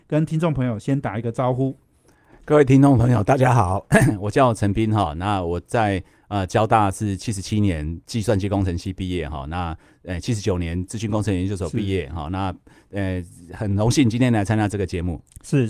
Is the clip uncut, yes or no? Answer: yes